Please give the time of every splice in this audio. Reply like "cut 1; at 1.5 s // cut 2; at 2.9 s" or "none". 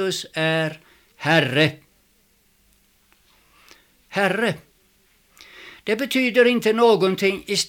none

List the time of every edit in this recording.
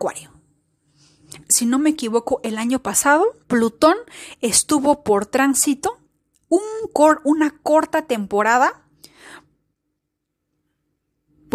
cut 1; at 1.4 s // cut 2; at 3.4 s

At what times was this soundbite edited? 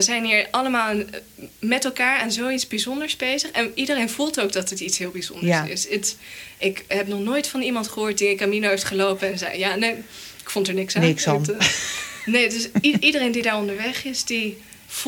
none

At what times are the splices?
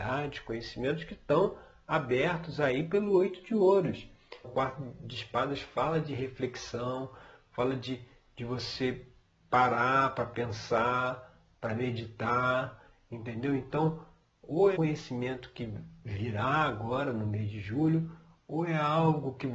cut 1; at 4.4 s // cut 2; at 14.8 s

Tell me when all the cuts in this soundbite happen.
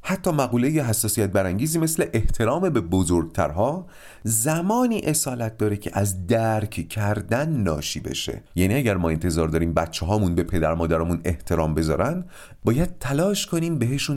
cut 1; at 8.5 s

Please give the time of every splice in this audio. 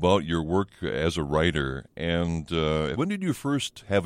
cut 1; at 2.9 s

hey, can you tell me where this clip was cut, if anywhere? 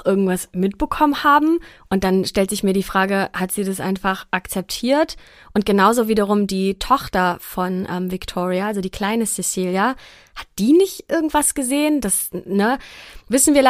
none

